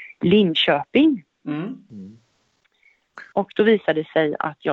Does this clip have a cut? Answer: yes; 1 cut; at 3.3 s

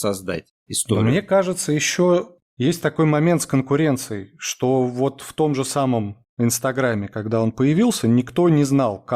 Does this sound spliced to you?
no; 0 cuts

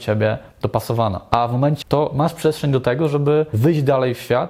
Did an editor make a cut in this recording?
yes; 1 cut; at 1.8 s

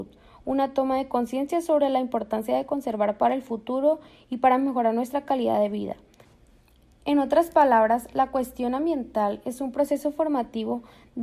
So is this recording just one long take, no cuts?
yes; 0 cuts

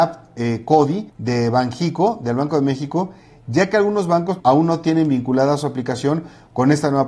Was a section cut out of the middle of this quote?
yes; 2 cuts; at 1.1 s, 4.4 s

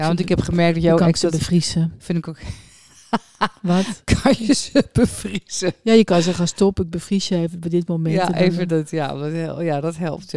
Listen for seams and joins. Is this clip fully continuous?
yes; 0 cuts

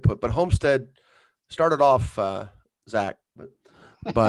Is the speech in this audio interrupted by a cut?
yes; 1 cut; at 3.4 s

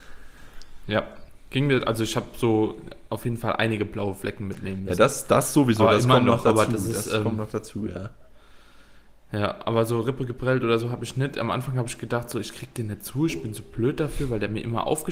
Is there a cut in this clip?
no; 0 cuts

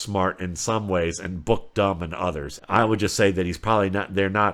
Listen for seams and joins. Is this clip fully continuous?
no; 1 cut; at 2.6 s

